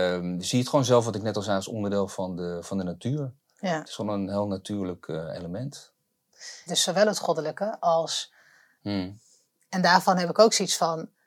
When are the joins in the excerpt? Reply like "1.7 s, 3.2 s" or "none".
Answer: 6.7 s, 8.8 s